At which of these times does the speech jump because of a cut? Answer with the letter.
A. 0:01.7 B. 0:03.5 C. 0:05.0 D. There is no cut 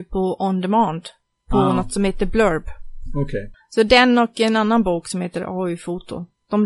B